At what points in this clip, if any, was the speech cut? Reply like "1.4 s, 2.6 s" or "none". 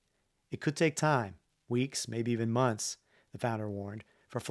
none